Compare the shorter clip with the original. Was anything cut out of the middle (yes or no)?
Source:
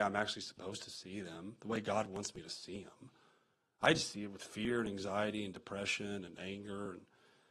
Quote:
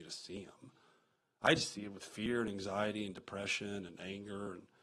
no